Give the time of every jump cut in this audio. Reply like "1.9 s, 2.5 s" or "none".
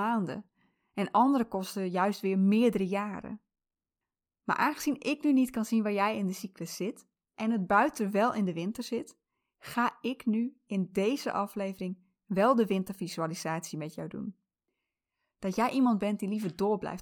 15.3 s